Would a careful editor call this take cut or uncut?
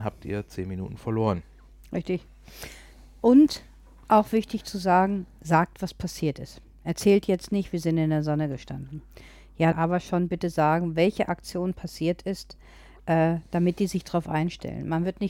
cut